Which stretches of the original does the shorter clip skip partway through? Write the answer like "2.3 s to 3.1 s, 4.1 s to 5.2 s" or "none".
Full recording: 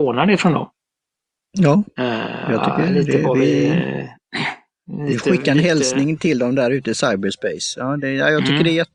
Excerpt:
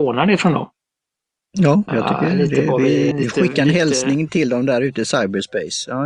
1.9 s to 2.4 s, 3.7 s to 5.0 s